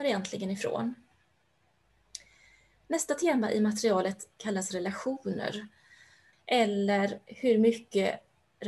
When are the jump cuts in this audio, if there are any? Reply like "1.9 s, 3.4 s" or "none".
6.3 s